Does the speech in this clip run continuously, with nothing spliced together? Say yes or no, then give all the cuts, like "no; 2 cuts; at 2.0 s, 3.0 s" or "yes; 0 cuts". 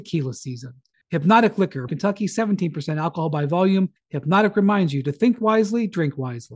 no; 1 cut; at 1.9 s